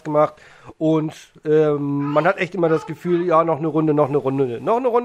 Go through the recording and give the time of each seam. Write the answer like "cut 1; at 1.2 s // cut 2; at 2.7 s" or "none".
none